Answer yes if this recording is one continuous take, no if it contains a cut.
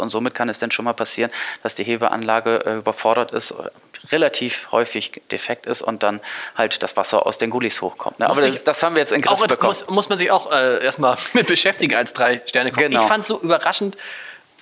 yes